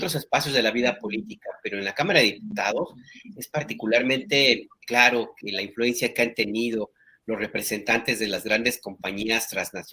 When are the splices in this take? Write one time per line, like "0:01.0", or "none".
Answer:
0:04.8